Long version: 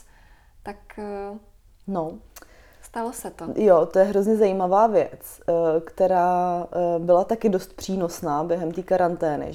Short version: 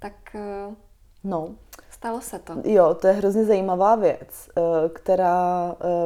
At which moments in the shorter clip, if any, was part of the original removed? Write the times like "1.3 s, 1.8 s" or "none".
1.8 s